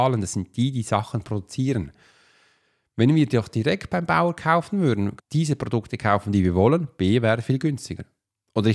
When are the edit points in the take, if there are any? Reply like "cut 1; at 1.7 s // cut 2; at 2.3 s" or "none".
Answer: cut 1; at 5.2 s